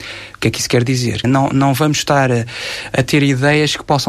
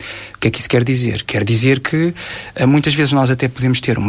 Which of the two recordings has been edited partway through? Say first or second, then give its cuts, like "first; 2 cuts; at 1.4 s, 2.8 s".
first; 1 cut; at 1.2 s